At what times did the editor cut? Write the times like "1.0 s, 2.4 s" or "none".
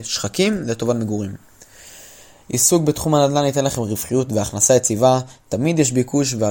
none

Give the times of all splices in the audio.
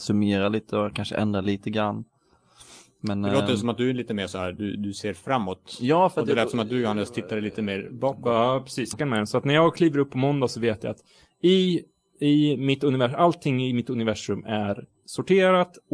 8.9 s

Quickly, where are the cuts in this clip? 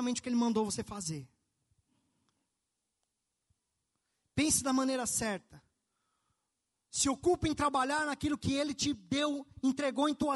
none

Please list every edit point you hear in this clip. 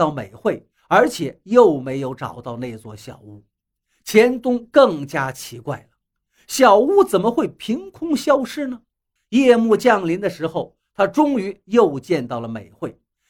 9.2 s

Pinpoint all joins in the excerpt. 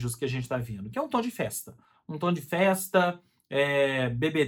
none

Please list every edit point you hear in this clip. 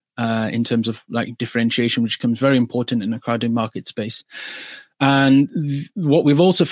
none

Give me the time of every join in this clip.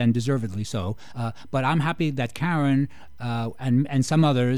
none

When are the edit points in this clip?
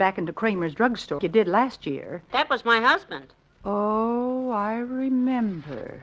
1.2 s, 2.3 s

